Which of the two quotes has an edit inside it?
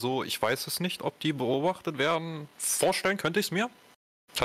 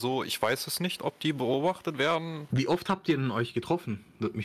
second; 1 cut; at 2.5 s

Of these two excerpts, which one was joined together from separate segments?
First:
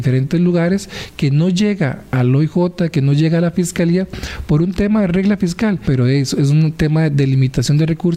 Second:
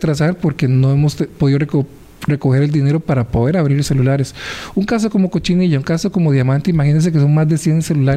first; 1 cut; at 5.8 s

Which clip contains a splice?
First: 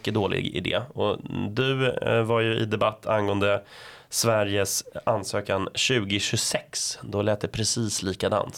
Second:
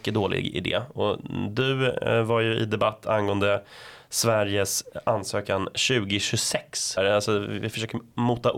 second; 1 cut; at 7.0 s

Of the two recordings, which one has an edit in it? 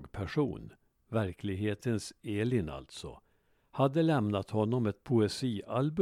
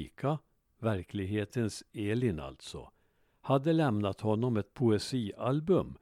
first; 1 cut; at 0.9 s

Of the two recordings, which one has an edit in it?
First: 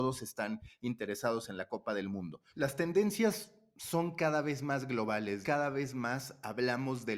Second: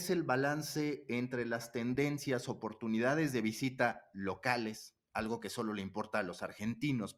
first; 2 cuts; at 2.5 s, 5.4 s

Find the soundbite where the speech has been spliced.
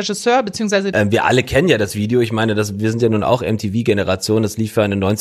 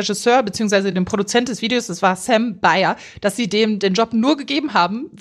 first; 1 cut; at 0.9 s

